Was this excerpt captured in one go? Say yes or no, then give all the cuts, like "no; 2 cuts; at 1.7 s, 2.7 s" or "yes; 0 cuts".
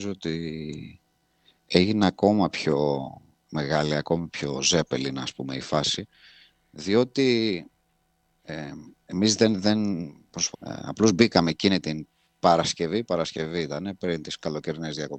no; 1 cut; at 10.5 s